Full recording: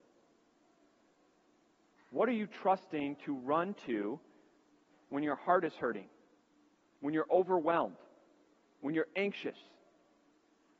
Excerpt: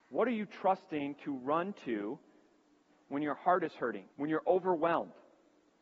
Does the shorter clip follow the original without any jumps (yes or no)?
no